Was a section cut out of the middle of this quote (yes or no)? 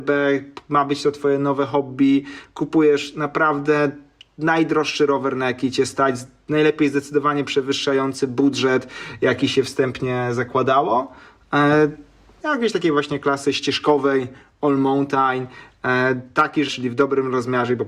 yes